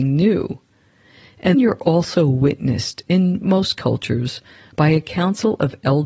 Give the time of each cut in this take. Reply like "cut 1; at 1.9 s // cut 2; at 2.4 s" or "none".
cut 1; at 1.5 s